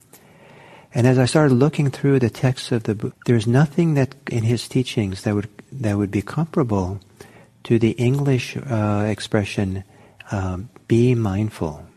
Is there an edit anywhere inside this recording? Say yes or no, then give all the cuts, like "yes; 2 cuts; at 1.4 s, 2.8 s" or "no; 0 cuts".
yes; 2 cuts; at 3.1 s, 4.3 s